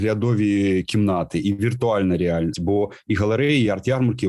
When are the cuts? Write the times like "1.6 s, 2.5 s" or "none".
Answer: 2.5 s